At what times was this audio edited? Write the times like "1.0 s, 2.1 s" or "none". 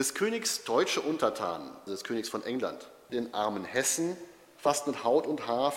1.9 s, 3.1 s